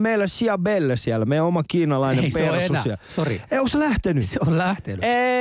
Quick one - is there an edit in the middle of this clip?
no; 0 cuts

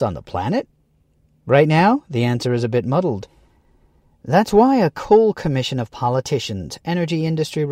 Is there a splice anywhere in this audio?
yes; 1 cut; at 6.8 s

